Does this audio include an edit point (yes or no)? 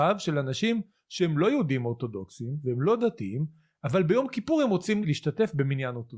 yes